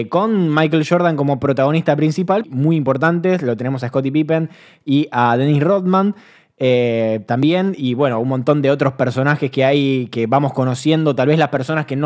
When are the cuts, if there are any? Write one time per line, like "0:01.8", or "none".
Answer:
0:02.4